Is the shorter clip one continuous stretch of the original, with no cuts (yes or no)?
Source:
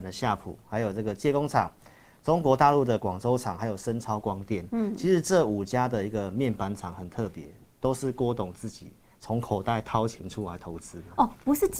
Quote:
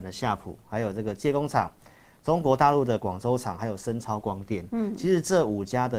yes